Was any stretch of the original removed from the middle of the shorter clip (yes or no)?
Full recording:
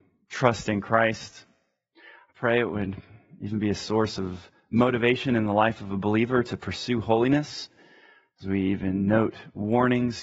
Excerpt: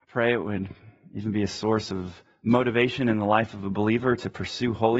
no